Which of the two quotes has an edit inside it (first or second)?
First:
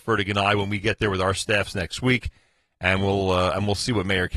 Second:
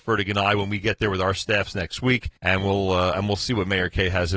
second